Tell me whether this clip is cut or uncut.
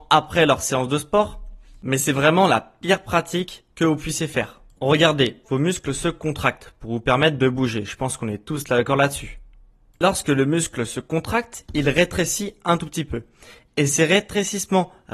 cut